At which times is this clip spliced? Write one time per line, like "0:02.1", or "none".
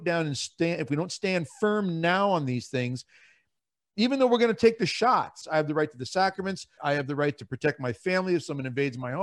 0:05.4
0:06.8